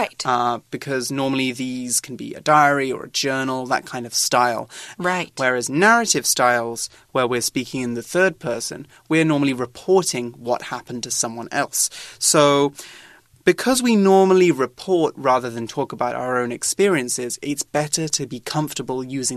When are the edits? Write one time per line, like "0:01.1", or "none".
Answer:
0:05.0

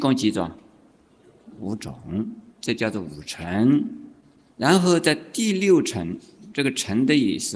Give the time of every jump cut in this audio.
none

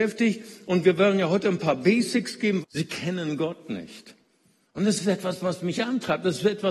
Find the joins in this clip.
0:02.6

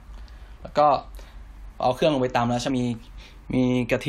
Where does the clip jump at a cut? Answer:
0:02.7

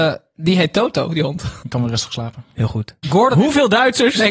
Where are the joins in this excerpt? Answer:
0:01.6
0:03.0

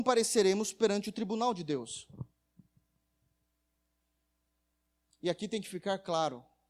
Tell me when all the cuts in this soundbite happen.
none

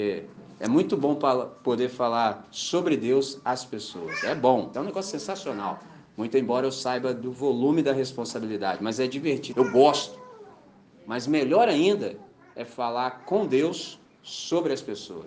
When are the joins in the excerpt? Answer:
0:04.7
0:09.5

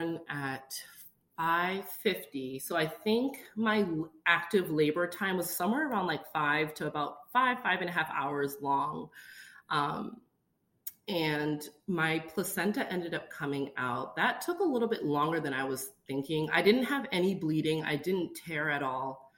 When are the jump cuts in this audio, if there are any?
none

